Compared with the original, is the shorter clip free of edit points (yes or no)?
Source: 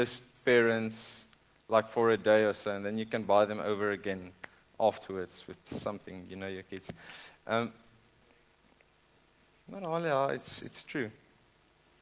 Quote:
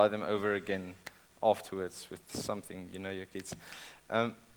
yes